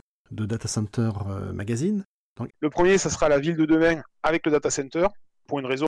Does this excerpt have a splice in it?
yes; 1 cut; at 2.5 s

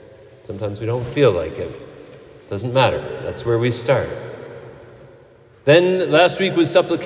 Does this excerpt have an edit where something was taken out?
no; 0 cuts

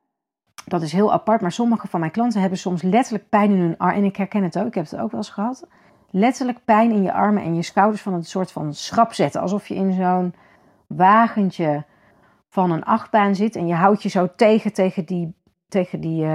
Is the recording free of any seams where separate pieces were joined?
yes; 0 cuts

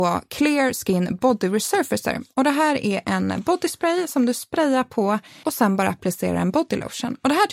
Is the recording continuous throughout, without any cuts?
no; 1 cut; at 5.4 s

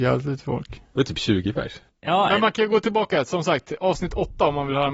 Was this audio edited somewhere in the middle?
no; 0 cuts

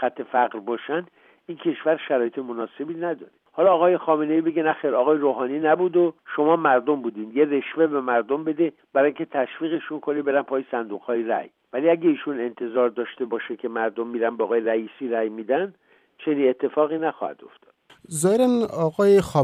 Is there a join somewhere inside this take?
no; 0 cuts

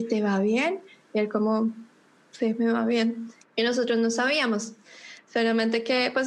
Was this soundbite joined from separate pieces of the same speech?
yes; 1 cut; at 3.4 s

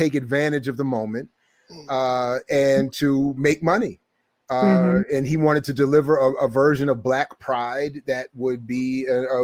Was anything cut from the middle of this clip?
no; 0 cuts

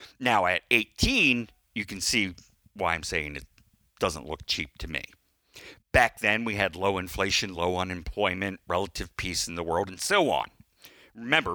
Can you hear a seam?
no; 0 cuts

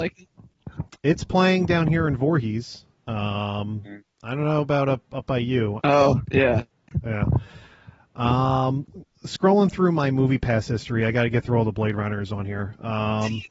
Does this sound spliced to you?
yes; 1 cut; at 5.8 s

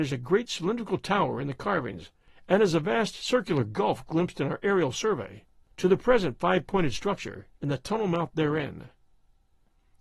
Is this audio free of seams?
yes; 0 cuts

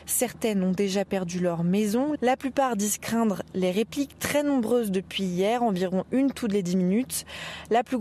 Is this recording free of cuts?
yes; 0 cuts

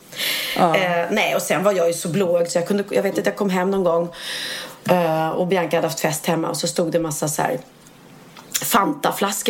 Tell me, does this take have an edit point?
no; 0 cuts

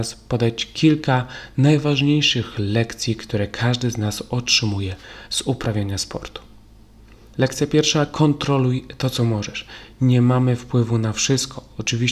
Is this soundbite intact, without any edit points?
yes; 0 cuts

